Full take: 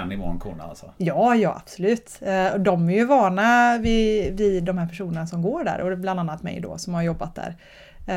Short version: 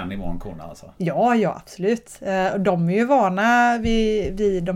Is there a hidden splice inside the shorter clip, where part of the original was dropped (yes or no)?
no